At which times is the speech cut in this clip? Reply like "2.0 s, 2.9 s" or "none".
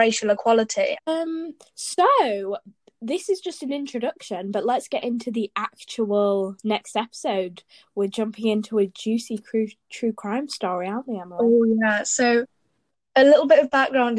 1.0 s